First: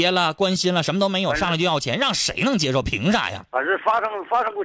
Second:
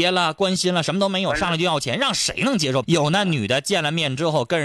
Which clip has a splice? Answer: second; 1 cut; at 2.8 s

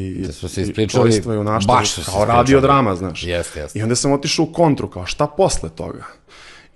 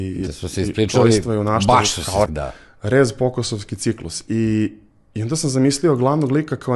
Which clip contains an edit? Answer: second; 1 cut; at 2.3 s

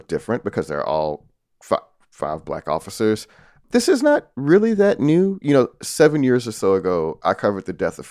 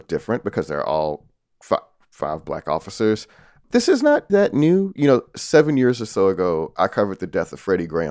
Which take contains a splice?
second; 1 cut; at 4.3 s

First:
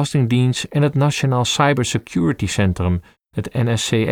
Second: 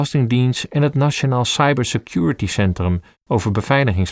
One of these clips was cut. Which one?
second; 1 cut; at 3.2 s

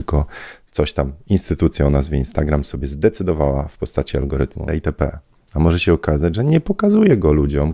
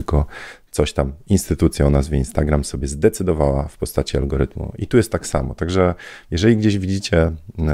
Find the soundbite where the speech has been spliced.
first; 2 cuts; at 4.7 s, 6.3 s

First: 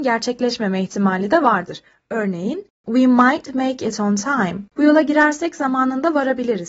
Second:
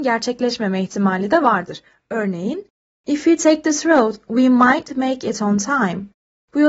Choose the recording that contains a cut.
first; 2 cuts; at 2.8 s, 4.7 s

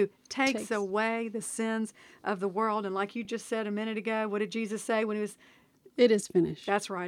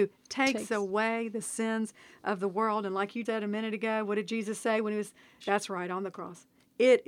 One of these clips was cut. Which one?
second; 2 cuts; at 3.2 s, 5.4 s

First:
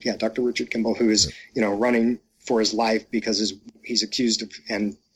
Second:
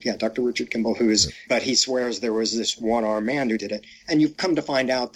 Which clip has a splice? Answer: second; 1 cut; at 1.5 s

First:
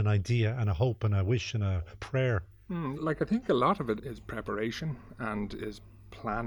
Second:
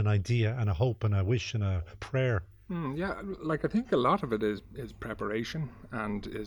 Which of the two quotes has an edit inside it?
first; 2 cuts; at 3.0 s, 4.0 s

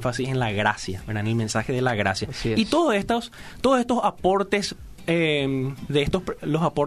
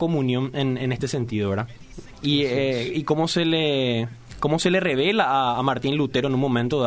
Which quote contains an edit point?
second; 1 cut; at 2.1 s

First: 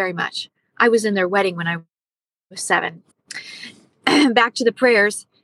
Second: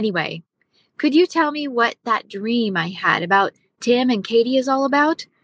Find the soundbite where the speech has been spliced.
first; 1 cut; at 3.1 s

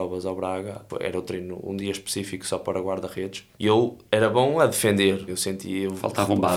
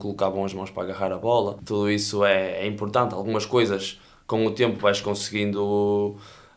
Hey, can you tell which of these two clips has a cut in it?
first; 1 cut; at 5.3 s

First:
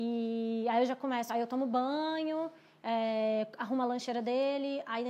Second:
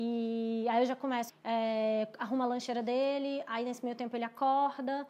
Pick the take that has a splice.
second; 1 cut; at 1.3 s

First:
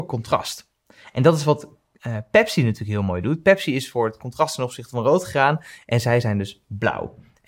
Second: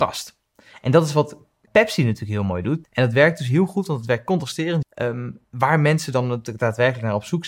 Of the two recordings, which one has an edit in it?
second; 3 cuts; at 1.7 s, 2.8 s, 4.8 s

